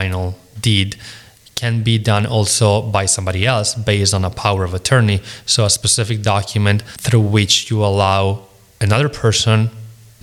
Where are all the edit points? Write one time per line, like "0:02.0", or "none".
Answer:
none